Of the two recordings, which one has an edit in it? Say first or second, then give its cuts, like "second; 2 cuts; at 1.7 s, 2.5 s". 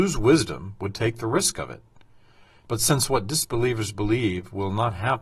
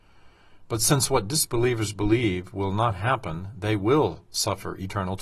first; 1 cut; at 2.7 s